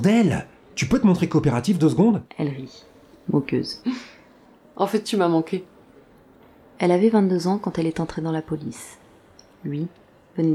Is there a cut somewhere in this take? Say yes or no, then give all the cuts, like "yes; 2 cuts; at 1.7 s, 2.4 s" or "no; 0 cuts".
no; 0 cuts